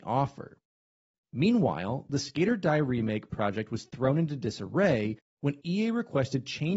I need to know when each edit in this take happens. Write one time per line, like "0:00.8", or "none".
0:01.2